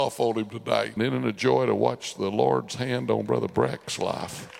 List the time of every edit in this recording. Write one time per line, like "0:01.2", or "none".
0:01.0